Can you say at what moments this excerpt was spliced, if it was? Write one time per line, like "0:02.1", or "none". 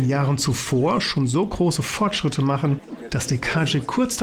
none